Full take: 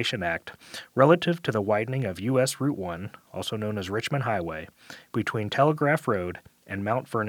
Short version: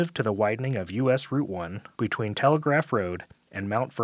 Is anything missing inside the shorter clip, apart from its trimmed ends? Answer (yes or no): yes